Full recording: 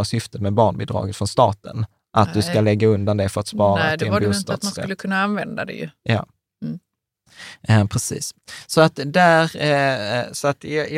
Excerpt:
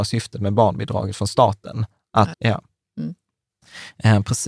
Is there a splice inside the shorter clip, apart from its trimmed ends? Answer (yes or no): yes